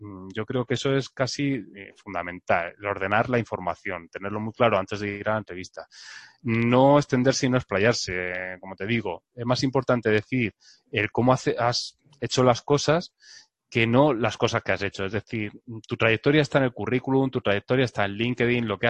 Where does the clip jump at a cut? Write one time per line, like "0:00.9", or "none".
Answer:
none